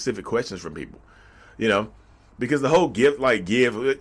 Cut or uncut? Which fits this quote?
uncut